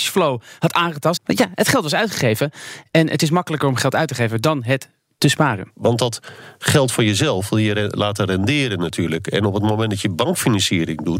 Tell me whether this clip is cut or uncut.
cut